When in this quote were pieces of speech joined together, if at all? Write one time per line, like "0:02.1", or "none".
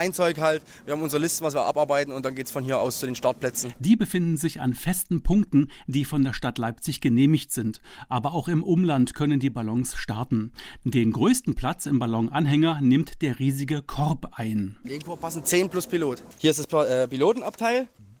0:14.8